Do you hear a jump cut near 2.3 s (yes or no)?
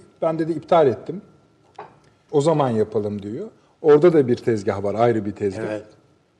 yes